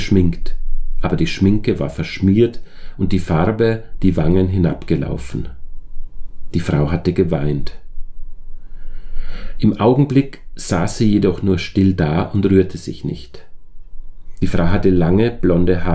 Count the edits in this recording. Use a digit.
1